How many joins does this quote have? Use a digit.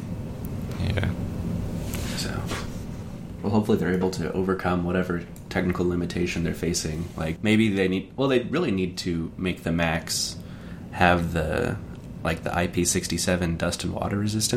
1